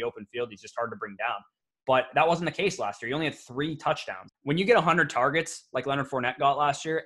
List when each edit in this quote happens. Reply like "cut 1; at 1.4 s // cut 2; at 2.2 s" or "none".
cut 1; at 4.3 s